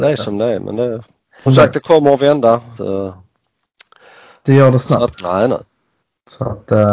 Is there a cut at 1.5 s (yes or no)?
yes